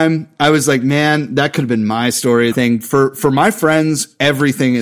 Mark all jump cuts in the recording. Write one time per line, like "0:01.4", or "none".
0:02.5